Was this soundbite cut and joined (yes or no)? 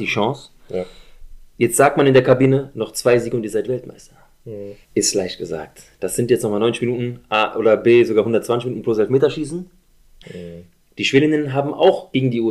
yes